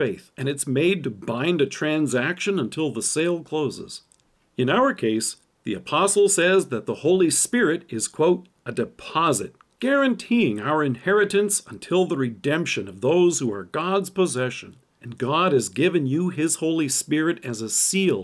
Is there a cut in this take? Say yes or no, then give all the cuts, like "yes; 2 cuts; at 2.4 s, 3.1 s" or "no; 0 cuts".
yes; 1 cut; at 15.0 s